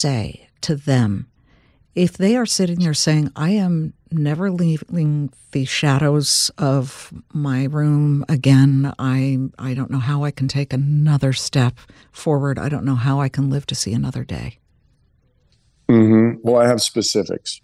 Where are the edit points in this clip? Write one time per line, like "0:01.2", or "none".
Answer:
none